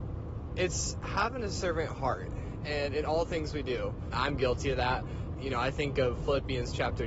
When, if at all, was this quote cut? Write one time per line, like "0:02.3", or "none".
0:04.1
0:05.4